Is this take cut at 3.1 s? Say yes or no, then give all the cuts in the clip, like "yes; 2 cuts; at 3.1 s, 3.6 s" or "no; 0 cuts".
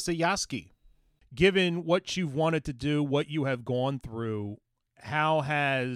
no; 0 cuts